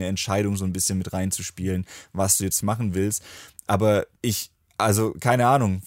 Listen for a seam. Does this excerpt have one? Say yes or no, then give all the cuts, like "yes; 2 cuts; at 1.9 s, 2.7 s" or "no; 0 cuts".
yes; 2 cuts; at 2.6 s, 4.2 s